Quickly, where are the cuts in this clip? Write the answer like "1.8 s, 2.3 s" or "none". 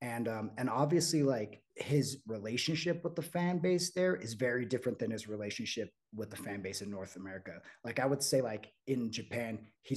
1.7 s